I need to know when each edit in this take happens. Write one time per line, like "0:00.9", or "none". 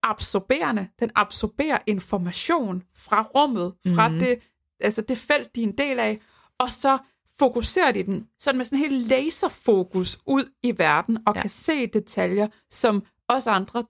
none